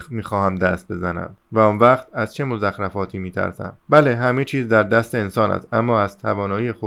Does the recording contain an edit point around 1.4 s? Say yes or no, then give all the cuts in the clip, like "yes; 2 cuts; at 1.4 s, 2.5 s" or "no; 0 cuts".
yes; 2 cuts; at 1.4 s, 3.8 s